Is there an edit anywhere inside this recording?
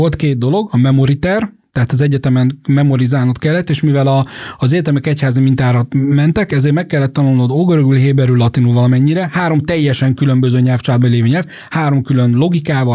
no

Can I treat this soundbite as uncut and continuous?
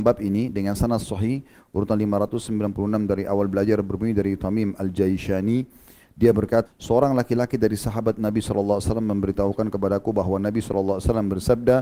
no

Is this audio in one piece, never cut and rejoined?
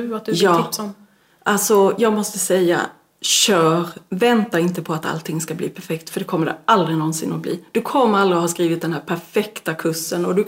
yes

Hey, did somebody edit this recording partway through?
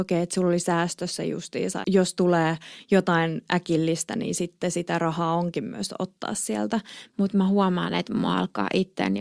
yes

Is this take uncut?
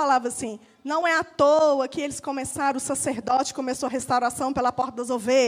yes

